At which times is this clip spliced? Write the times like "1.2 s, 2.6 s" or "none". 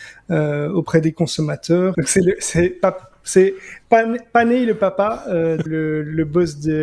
1.9 s, 5.7 s

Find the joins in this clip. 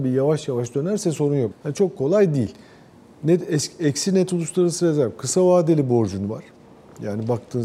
1.5 s

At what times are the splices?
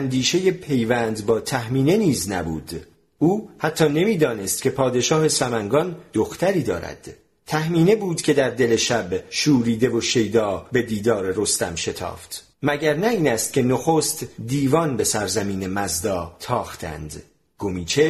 12.5 s

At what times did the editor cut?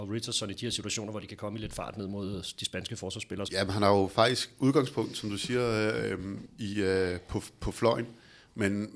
3.5 s

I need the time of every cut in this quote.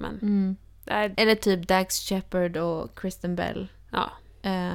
1.1 s

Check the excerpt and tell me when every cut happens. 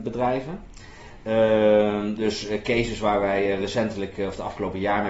none

